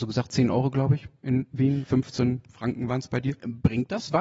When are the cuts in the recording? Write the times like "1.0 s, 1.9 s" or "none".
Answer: none